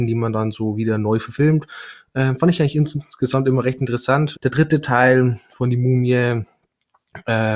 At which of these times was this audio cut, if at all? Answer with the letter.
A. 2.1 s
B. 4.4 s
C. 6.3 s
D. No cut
B